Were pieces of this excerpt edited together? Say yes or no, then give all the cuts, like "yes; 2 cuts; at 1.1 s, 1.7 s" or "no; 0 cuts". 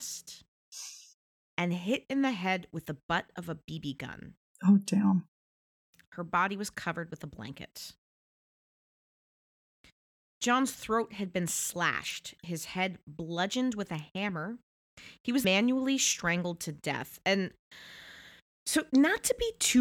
yes; 1 cut; at 15.4 s